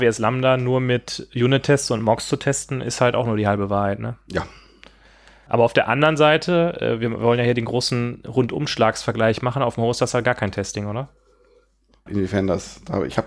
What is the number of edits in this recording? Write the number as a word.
two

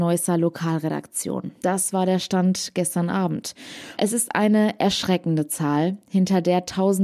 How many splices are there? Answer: two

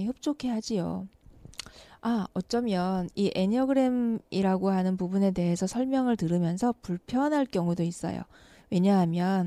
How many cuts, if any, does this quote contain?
zero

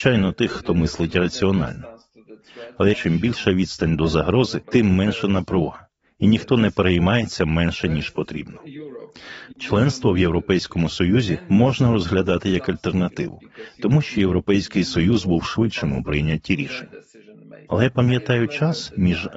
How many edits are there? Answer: two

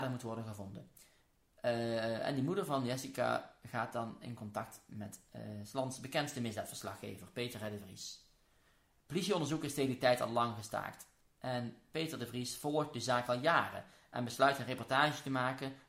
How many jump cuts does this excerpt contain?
zero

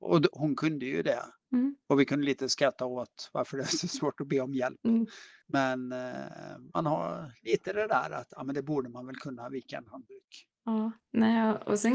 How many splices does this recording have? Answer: zero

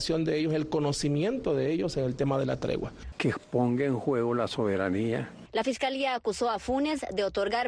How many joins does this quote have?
one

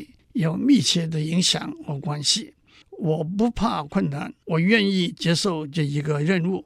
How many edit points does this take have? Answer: two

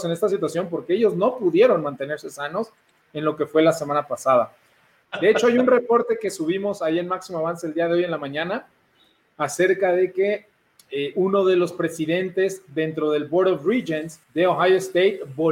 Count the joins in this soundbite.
three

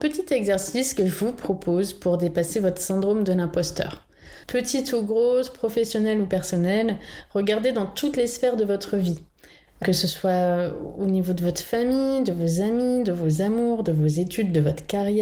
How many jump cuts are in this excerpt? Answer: one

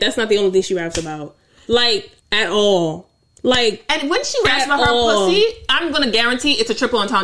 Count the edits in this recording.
one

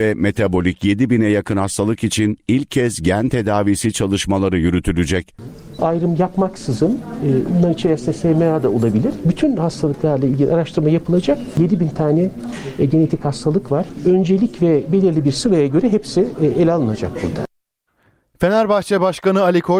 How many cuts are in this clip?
one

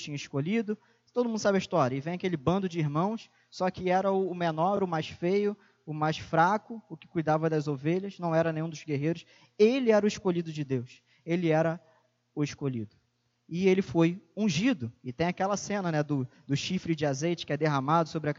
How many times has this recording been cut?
zero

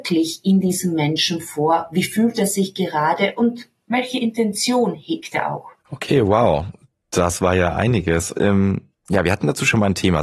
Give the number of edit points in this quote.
two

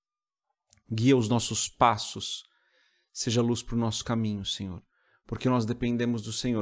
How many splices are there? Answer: zero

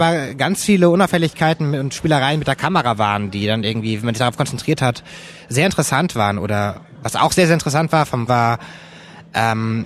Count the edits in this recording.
one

